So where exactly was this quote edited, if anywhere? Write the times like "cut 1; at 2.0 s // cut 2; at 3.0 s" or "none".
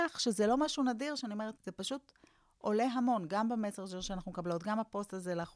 cut 1; at 1.6 s